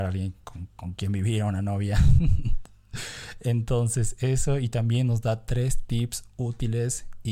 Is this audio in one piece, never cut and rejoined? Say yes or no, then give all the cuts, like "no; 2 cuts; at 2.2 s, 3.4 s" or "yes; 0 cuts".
yes; 0 cuts